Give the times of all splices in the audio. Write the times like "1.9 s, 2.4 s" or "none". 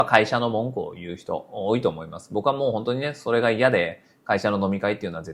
none